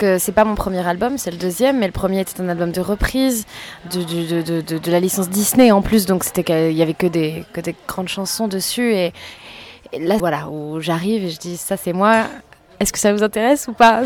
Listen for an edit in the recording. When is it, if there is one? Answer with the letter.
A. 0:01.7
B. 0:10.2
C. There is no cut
B